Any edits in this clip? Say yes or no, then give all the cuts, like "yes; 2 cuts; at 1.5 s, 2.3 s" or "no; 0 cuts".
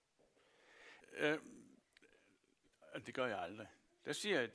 yes; 2 cuts; at 1.0 s, 3.0 s